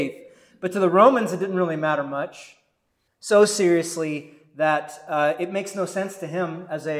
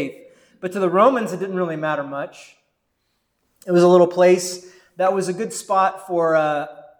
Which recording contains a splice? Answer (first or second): first